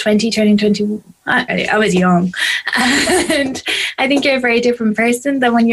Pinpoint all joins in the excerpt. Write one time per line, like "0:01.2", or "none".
0:01.5